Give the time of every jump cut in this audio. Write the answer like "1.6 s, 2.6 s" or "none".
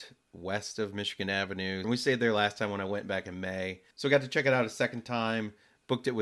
1.8 s, 3.9 s